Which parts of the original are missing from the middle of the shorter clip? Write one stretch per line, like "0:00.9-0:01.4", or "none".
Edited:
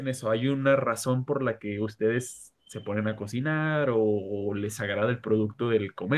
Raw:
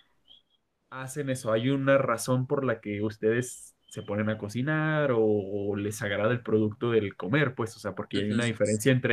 none